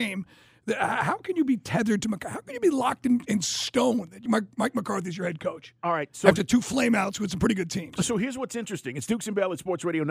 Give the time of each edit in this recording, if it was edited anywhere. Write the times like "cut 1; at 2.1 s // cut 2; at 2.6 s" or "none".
cut 1; at 4.3 s